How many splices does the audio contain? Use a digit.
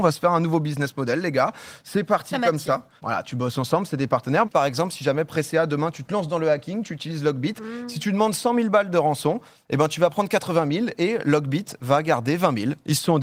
2